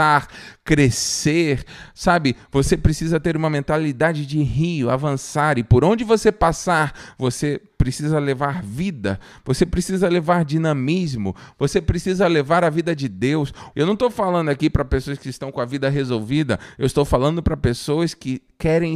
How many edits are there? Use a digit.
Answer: 1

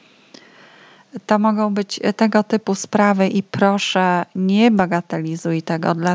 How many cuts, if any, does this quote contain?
0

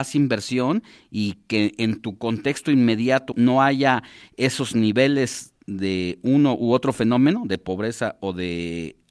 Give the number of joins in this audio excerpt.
1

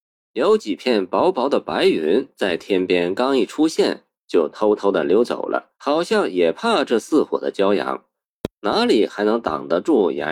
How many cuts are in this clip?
1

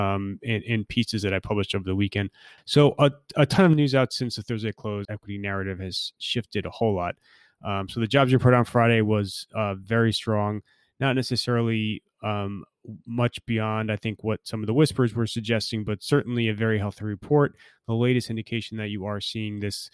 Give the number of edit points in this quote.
2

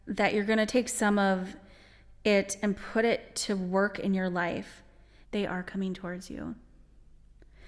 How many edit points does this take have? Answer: 1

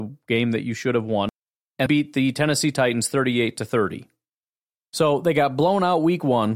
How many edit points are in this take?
1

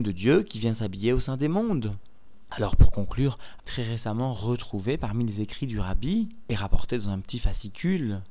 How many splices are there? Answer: 2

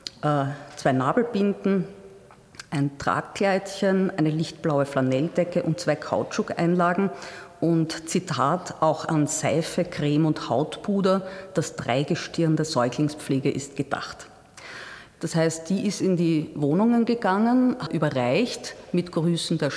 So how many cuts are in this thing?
2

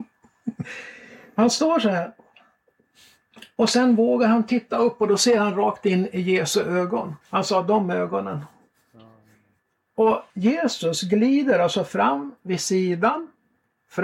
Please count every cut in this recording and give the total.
2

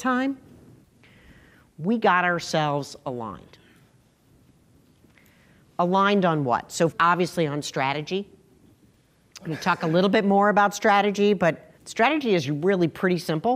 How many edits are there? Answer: 2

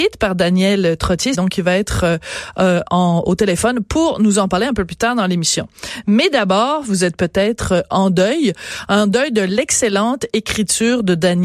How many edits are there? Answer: 2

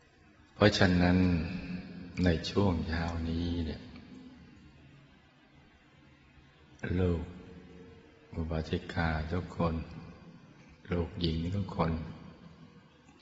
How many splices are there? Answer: 1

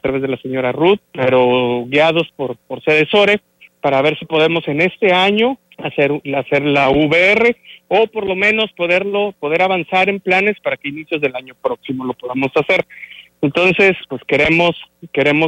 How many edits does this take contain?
3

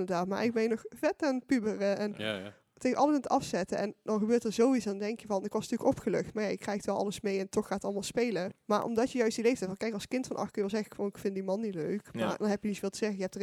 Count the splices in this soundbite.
1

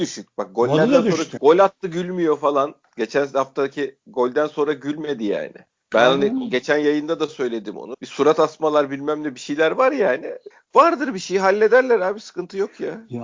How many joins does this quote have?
1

